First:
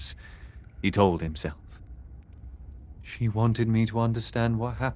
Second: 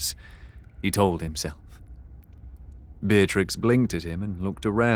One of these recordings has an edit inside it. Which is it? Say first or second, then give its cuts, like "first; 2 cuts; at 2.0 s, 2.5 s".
first; 1 cut; at 3.0 s